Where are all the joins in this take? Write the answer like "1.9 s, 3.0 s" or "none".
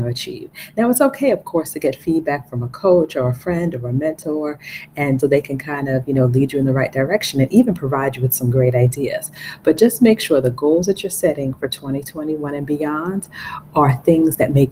5.2 s